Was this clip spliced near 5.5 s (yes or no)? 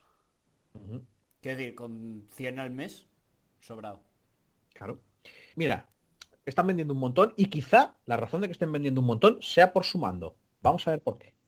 yes